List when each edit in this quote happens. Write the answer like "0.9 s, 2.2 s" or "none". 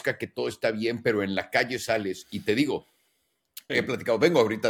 3.7 s